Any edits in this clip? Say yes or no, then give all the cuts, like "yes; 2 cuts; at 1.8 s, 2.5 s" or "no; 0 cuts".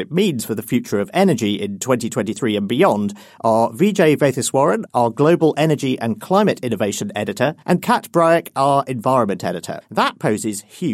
yes; 2 cuts; at 7.6 s, 9.8 s